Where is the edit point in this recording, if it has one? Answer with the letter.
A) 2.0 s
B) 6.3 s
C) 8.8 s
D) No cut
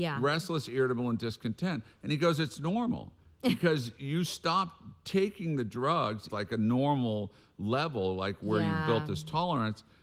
B